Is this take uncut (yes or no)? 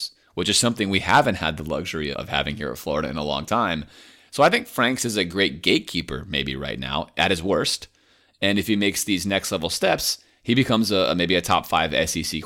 no